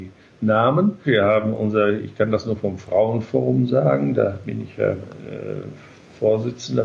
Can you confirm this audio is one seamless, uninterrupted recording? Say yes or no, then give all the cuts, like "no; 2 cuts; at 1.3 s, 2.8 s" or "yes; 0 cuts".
no; 1 cut; at 1.0 s